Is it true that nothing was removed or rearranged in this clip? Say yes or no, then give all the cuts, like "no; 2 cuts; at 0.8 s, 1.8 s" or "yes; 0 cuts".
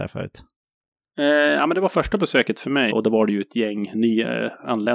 no; 1 cut; at 2.9 s